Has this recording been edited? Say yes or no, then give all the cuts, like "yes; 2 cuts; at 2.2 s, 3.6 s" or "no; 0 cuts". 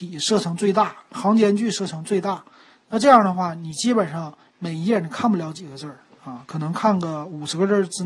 no; 0 cuts